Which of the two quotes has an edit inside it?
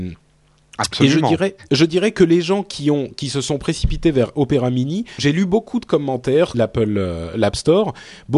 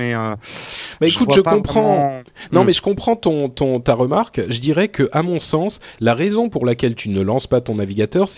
first; 2 cuts; at 5.2 s, 6.5 s

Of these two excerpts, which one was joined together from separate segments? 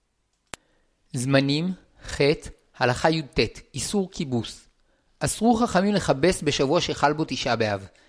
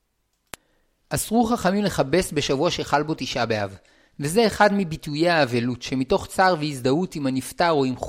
second; 1 cut; at 1.0 s

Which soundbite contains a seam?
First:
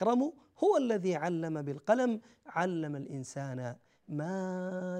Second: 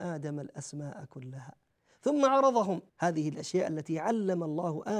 second; 1 cut; at 2.9 s

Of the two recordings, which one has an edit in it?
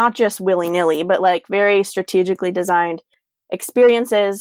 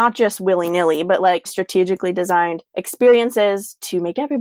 second; 2 cuts; at 1.5 s, 2.7 s

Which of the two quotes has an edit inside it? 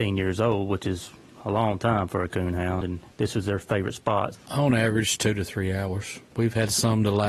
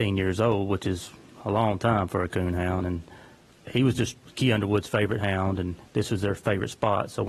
first; 3 cuts; at 2.8 s, 4.3 s, 6.3 s

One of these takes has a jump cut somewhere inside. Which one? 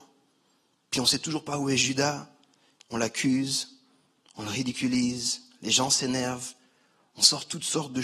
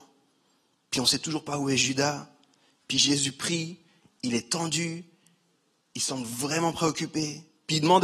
first; 1 cut; at 2.8 s

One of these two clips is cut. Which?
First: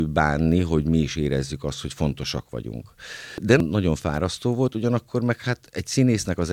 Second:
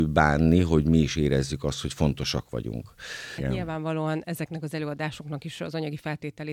second; 1 cut; at 3.4 s

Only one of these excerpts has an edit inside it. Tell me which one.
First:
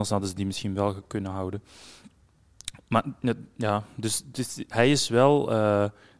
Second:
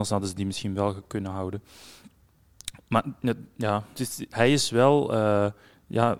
second; 1 cut; at 3.9 s

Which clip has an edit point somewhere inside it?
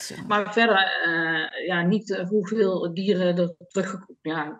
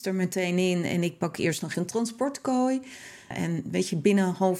second; 2 cuts; at 1.7 s, 3.3 s

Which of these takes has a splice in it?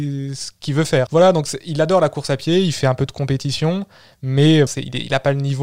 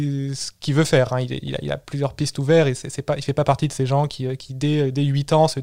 first; 2 cuts; at 1.1 s, 4.7 s

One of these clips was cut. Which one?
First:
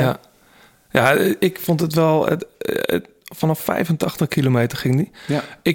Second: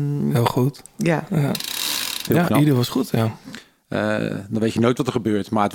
second; 1 cut; at 2.3 s

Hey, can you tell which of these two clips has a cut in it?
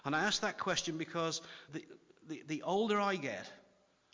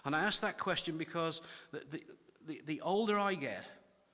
first; 1 cut; at 1.7 s

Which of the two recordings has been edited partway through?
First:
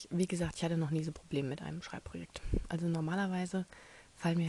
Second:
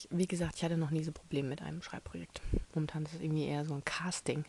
second; 1 cut; at 2.6 s

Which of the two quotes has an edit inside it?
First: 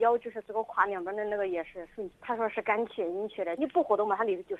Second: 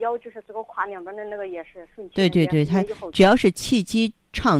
first; 2 cuts; at 2.1 s, 3.6 s

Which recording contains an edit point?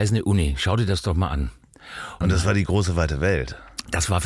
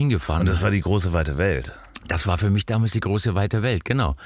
first; 1 cut; at 2.2 s

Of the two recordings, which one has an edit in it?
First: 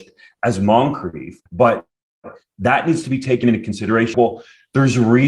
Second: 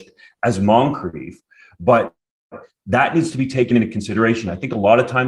first; 2 cuts; at 1.5 s, 4.1 s

